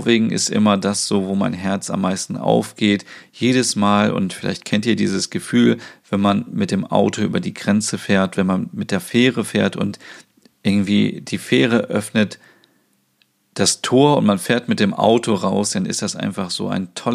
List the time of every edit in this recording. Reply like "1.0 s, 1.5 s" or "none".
none